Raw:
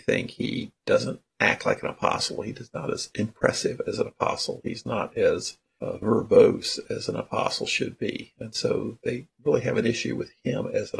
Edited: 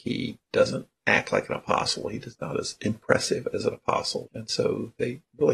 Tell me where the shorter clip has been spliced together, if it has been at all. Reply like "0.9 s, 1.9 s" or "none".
4.3 s